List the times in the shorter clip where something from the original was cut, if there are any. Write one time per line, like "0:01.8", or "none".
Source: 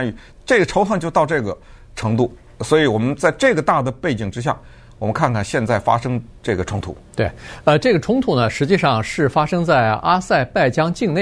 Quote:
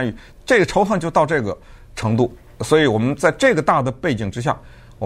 none